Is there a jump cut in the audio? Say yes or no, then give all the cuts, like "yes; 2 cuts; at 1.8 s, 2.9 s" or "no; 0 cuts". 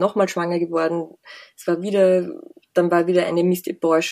no; 0 cuts